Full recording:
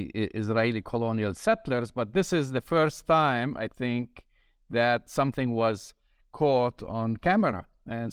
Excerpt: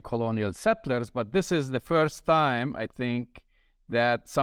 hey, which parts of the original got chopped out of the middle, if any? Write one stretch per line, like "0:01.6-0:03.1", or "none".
none